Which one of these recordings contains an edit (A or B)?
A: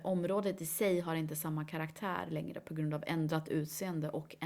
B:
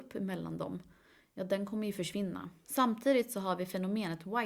B